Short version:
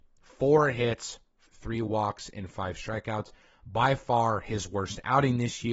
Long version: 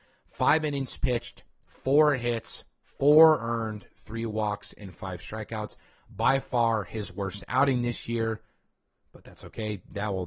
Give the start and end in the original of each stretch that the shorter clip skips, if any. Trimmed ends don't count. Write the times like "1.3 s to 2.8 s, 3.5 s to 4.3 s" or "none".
2.9 s to 3.9 s